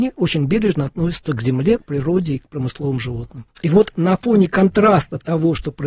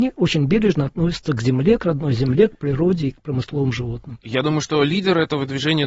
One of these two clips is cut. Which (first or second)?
first